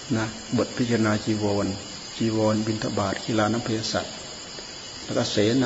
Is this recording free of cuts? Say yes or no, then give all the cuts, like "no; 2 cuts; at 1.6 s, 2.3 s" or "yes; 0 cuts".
yes; 0 cuts